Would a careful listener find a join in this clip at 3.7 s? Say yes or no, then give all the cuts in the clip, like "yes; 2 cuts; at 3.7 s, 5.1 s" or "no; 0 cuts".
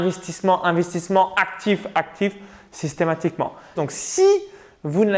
yes; 2 cuts; at 1.9 s, 3.7 s